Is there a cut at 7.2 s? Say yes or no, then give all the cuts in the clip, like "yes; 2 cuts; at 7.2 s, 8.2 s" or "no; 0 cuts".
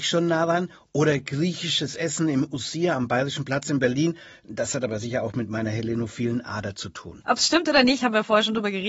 yes; 1 cut; at 7.2 s